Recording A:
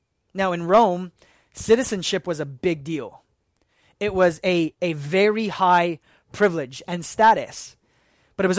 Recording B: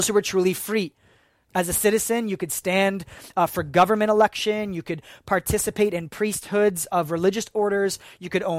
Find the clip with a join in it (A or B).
B